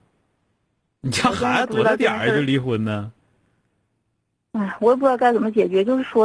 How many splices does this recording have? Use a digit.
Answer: 0